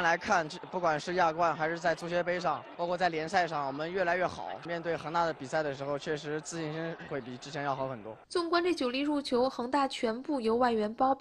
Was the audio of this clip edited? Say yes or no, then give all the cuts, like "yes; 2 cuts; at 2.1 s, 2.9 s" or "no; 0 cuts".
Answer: yes; 1 cut; at 8.2 s